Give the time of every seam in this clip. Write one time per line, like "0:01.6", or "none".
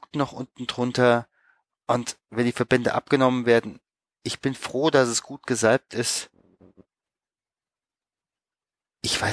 none